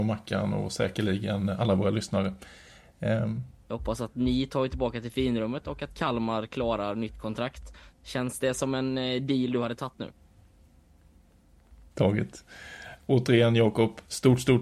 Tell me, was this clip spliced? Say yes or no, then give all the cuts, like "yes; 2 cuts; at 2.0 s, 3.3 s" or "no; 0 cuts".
yes; 3 cuts; at 3.6 s, 11.9 s, 13.0 s